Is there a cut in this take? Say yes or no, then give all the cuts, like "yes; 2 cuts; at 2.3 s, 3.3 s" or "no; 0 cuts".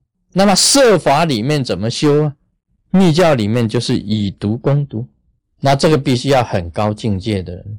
no; 0 cuts